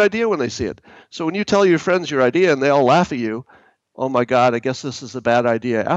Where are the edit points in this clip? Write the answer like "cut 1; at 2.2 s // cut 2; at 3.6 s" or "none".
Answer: cut 1; at 3.8 s

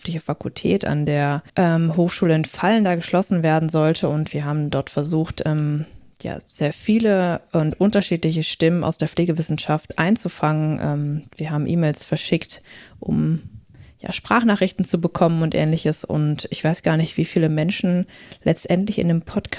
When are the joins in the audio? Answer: cut 1; at 1.5 s

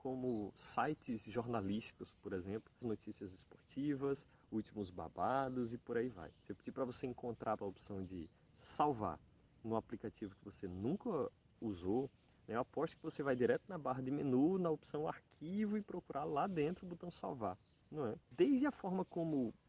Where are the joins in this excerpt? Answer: cut 1; at 2.8 s // cut 2; at 7.6 s

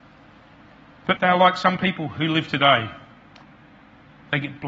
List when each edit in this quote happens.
cut 1; at 1.2 s

